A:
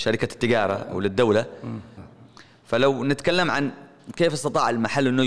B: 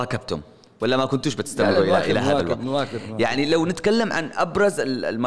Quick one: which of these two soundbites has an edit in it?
A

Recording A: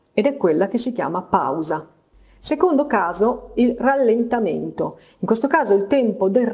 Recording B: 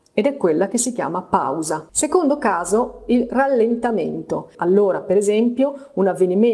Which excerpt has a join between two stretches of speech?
B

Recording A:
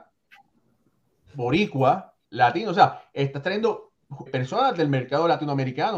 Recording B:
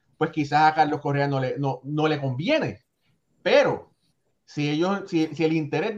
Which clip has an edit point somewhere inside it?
A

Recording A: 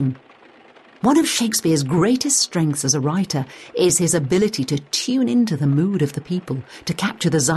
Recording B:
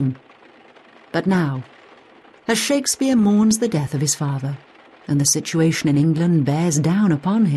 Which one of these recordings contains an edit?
A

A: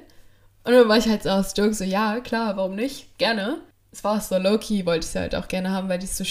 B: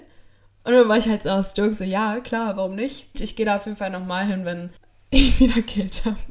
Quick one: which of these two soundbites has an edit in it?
B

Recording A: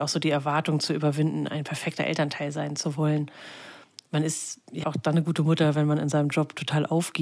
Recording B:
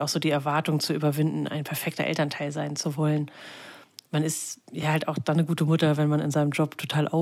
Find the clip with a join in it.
A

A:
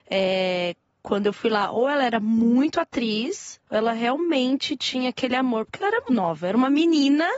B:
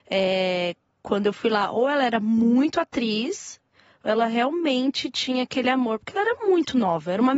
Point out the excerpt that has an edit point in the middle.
A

